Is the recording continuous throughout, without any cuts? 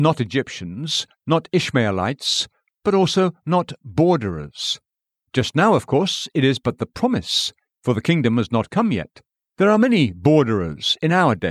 no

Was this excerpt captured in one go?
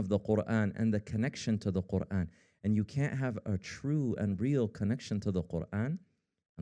yes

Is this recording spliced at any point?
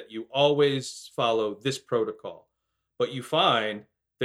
no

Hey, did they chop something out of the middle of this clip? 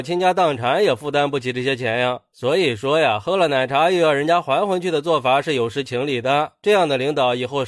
no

